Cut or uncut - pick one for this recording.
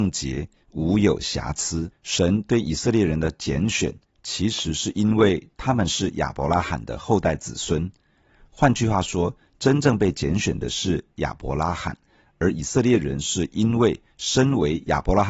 cut